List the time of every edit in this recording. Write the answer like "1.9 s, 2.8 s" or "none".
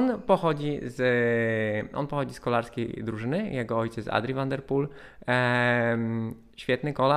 none